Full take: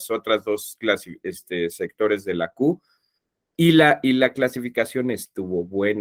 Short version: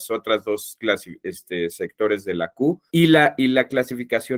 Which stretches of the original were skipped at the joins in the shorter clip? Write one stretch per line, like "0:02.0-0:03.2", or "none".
0:02.9-0:03.5